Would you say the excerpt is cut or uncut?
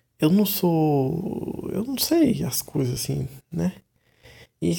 uncut